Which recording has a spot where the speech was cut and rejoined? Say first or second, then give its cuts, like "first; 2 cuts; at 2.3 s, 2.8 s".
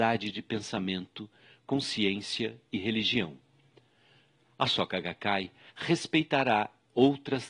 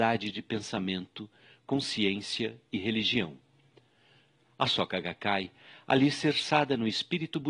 first; 1 cut; at 5.7 s